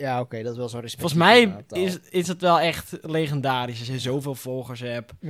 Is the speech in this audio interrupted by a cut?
no; 0 cuts

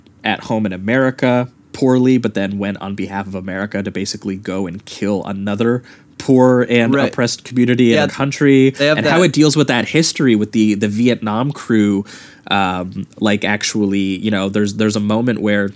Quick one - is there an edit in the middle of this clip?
yes; 1 cut; at 8.1 s

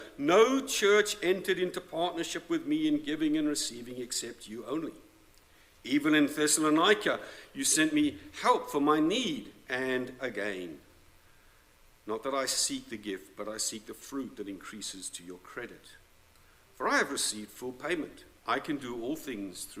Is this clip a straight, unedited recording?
no; 1 cut; at 18.4 s

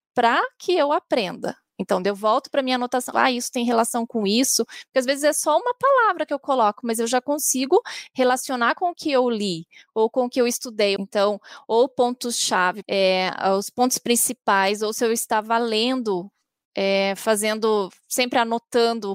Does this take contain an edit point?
yes; 3 cuts; at 3.1 s, 11.0 s, 12.8 s

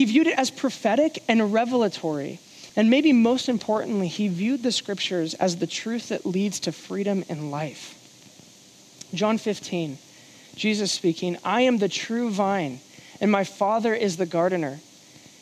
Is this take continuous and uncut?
no; 1 cut; at 2.7 s

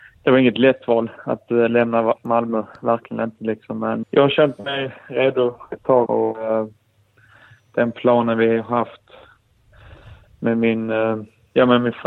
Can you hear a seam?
yes; 2 cuts; at 4.0 s, 6.1 s

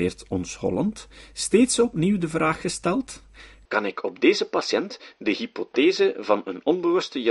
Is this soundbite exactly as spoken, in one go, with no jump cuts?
yes; 0 cuts

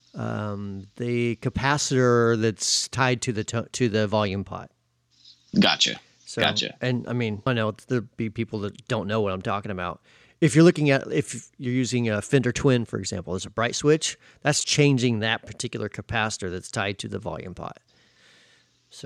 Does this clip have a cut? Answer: yes; 2 cuts; at 7.5 s, 14.6 s

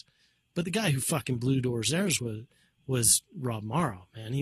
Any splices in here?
no; 0 cuts

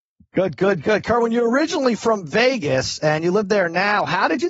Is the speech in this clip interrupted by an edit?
no; 0 cuts

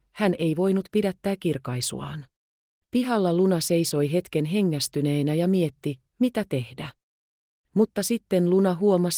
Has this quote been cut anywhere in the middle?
yes; 2 cuts; at 2.8 s, 7.6 s

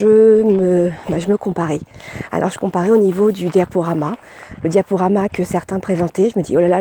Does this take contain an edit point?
no; 0 cuts

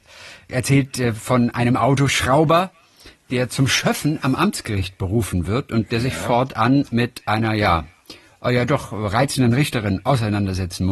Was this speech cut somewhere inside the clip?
no; 0 cuts

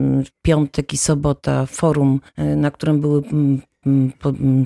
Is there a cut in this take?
yes; 1 cut; at 2.3 s

